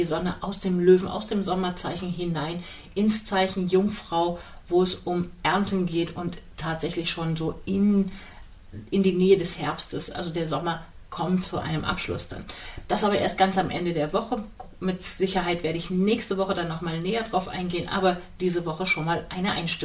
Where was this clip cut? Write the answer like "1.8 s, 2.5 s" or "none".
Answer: none